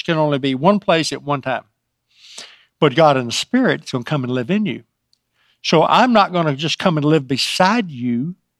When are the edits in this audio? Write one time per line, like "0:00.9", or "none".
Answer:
none